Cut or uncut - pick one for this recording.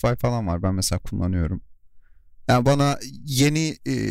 uncut